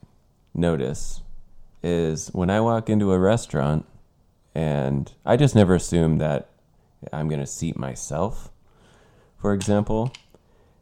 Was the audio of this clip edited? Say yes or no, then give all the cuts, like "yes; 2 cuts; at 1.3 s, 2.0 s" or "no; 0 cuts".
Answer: no; 0 cuts